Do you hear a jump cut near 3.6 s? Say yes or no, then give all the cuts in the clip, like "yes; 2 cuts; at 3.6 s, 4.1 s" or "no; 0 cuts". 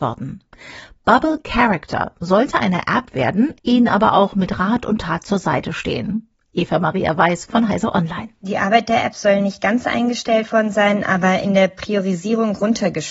yes; 1 cut; at 3.6 s